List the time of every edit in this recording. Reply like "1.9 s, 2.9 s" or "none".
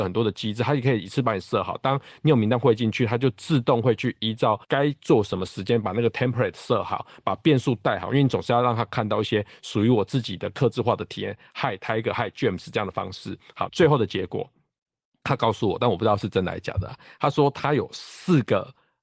4.6 s, 13.7 s

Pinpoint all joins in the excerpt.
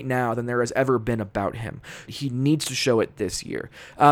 2.1 s

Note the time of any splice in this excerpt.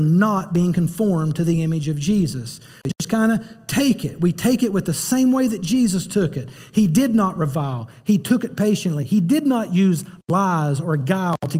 2.8 s

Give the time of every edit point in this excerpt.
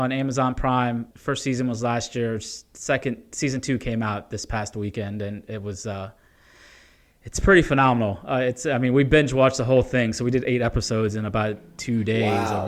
1.1 s

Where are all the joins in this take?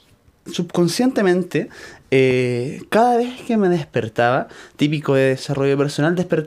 none

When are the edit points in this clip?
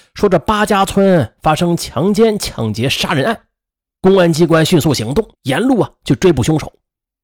3.9 s, 5.3 s

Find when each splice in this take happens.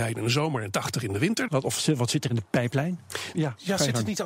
1.5 s, 3.3 s

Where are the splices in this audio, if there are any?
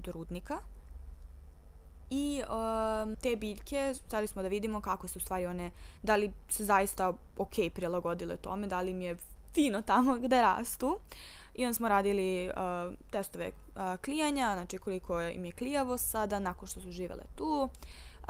3.1 s

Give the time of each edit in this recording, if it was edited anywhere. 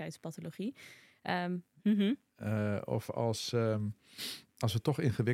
1.7 s

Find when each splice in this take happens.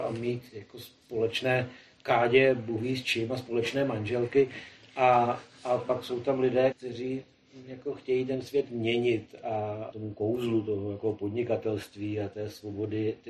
6.7 s, 9.9 s

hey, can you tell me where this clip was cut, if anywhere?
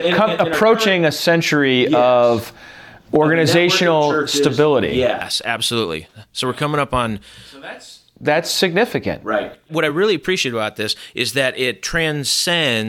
none

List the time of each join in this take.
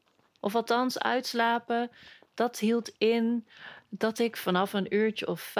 none

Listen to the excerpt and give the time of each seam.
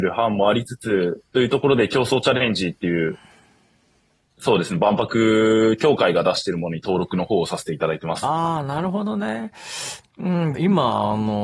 10.5 s

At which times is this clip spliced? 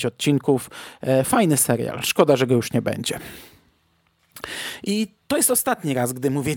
none

